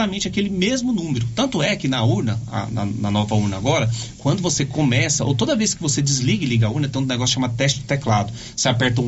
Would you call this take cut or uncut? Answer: uncut